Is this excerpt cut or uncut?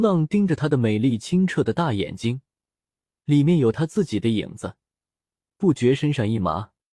cut